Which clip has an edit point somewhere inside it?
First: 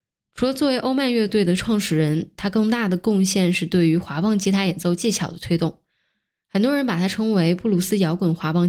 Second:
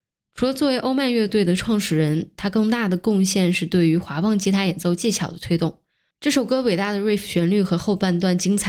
second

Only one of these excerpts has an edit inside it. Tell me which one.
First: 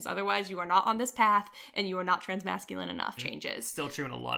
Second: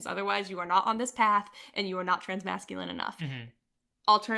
first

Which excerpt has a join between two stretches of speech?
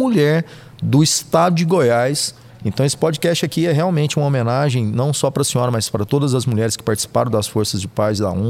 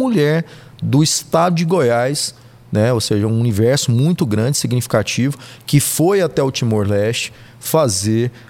first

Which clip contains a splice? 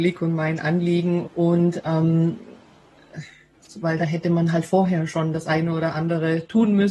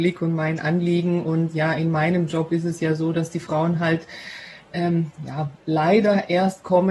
first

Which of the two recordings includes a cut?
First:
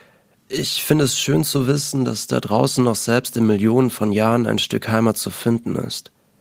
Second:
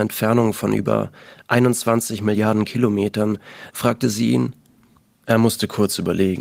second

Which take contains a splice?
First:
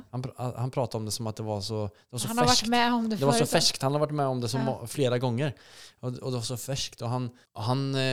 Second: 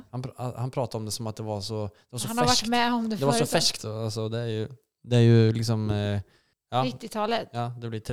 second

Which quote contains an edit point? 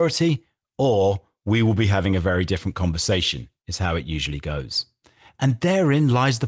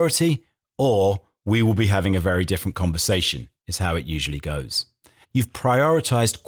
second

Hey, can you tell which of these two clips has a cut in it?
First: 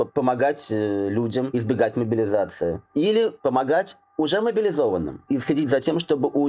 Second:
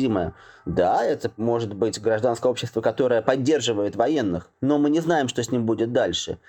first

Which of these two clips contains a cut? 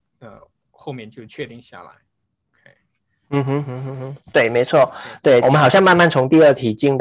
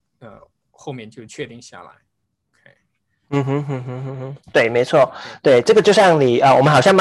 first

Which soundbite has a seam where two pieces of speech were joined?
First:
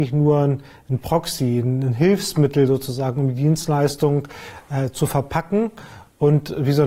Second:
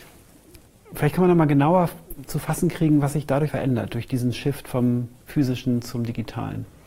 second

